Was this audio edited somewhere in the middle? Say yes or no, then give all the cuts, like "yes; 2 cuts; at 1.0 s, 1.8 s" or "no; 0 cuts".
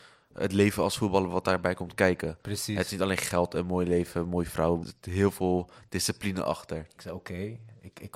yes; 2 cuts; at 4.8 s, 7.0 s